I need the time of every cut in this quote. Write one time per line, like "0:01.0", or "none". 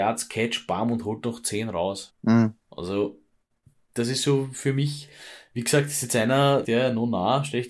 0:02.1
0:06.6